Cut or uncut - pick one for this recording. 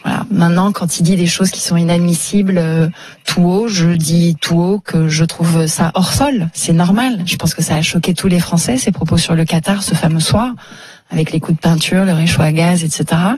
uncut